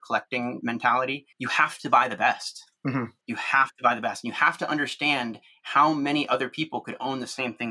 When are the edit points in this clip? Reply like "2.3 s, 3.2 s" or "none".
1.3 s